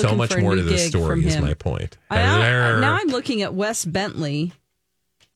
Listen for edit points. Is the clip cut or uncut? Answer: uncut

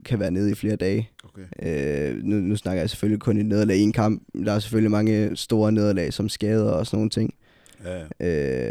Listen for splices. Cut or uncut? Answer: cut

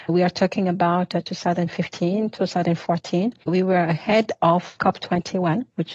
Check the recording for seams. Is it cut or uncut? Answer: cut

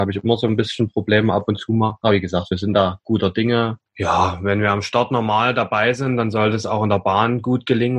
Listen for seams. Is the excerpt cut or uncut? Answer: uncut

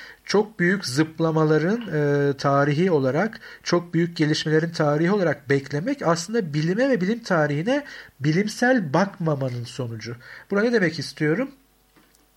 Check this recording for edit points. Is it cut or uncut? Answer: uncut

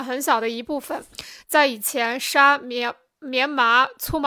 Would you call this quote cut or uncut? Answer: cut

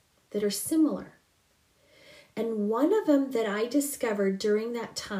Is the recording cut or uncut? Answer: uncut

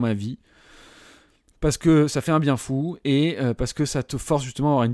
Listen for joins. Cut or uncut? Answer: uncut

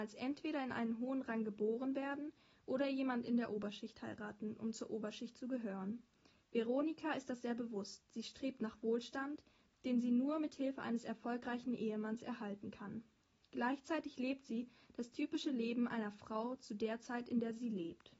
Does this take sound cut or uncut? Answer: uncut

